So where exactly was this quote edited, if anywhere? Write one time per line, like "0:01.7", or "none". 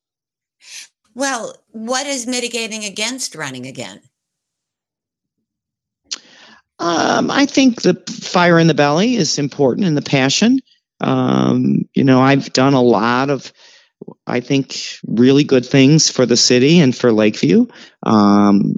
0:15.0